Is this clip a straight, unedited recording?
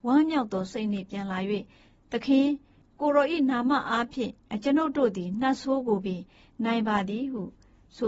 yes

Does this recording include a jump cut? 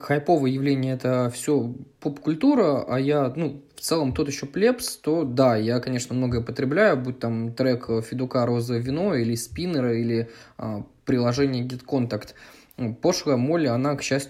no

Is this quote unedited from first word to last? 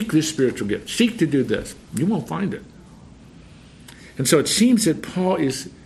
yes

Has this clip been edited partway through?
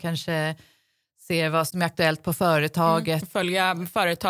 yes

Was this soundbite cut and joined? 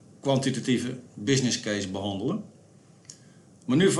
no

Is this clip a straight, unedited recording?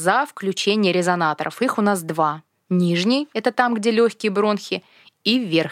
yes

